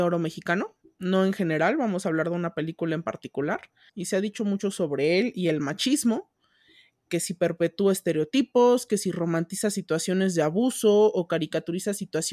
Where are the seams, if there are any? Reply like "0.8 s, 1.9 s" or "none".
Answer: 3.9 s